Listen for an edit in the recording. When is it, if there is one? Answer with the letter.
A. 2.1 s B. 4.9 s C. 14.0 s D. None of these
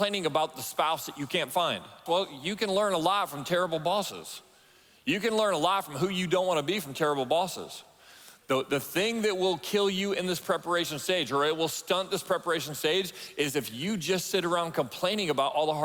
A